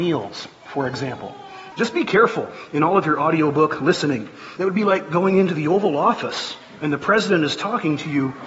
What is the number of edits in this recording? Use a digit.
2